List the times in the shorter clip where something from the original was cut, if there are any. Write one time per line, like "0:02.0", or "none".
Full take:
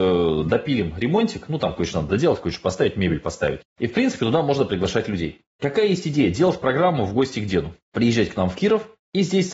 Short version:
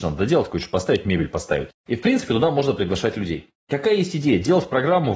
none

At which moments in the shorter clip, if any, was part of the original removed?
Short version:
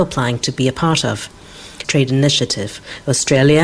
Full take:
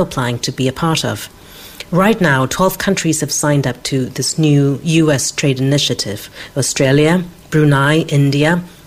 0:01.8

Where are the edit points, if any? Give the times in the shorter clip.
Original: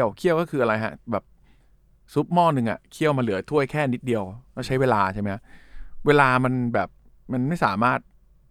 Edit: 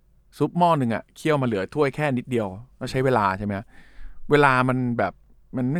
none

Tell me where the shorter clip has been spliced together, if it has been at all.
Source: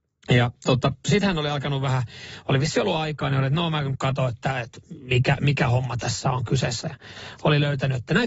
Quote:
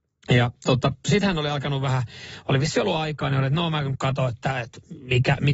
none

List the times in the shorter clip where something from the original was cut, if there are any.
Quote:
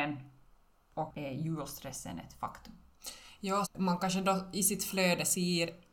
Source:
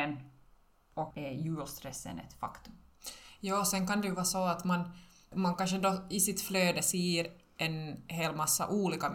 0:03.6

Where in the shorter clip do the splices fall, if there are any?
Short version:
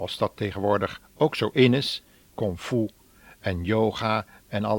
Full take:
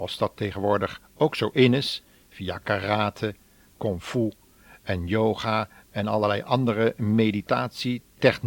0:02.2

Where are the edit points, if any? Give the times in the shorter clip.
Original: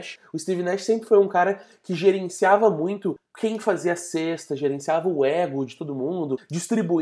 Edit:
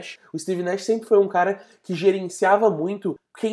none

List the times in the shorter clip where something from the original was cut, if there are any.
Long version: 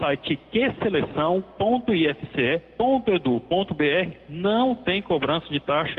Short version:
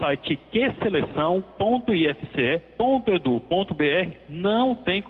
none

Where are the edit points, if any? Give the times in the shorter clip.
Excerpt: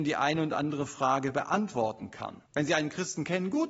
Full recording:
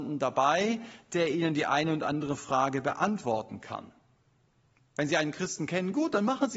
0:02.5

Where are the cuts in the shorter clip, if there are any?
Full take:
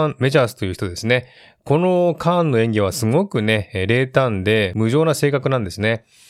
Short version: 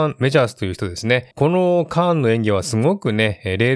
0:01.3

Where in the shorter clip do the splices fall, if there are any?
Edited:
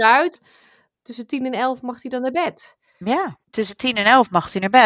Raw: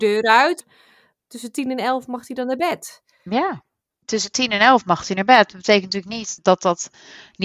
0:03.4

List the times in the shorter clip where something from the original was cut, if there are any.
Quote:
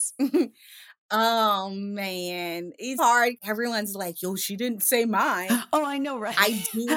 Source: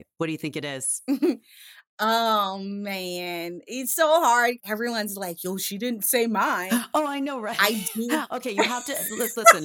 0:03.0

